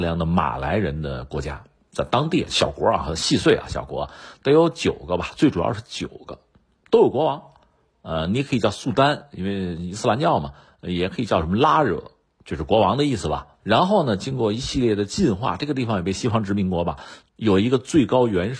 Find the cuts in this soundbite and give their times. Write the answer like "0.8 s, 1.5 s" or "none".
13.6 s, 17.2 s